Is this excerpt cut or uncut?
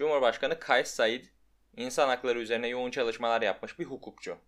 uncut